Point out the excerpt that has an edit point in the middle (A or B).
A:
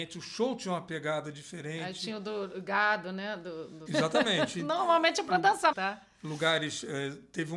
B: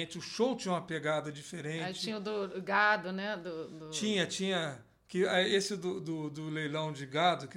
A